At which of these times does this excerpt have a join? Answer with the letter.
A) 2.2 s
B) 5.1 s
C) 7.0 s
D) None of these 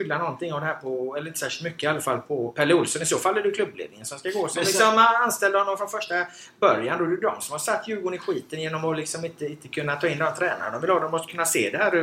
A